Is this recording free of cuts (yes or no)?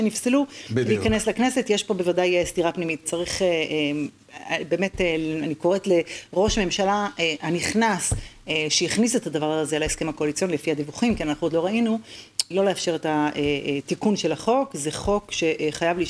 no